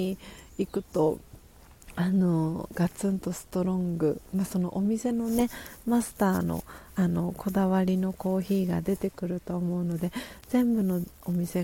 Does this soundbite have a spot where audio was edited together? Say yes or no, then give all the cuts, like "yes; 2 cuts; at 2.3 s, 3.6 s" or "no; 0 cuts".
no; 0 cuts